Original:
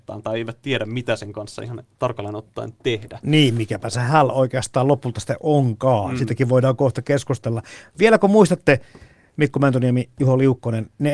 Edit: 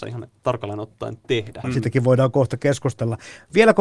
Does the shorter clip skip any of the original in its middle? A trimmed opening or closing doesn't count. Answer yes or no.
yes